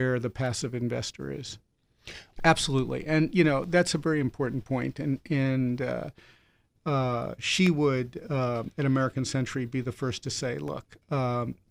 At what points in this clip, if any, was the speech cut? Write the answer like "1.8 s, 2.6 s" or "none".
2.4 s